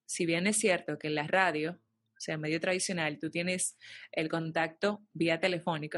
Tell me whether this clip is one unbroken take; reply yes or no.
yes